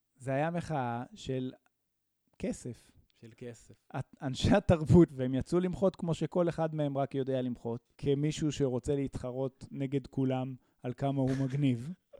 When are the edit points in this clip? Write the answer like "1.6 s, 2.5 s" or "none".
5.1 s, 7.9 s